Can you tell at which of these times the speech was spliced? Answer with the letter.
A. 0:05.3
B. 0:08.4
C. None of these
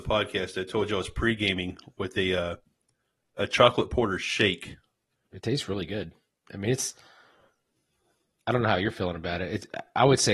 A